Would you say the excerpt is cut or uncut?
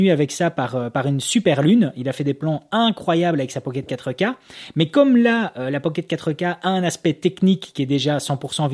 uncut